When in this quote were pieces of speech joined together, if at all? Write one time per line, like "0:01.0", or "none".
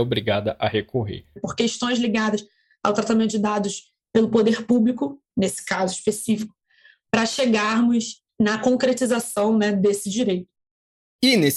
0:01.4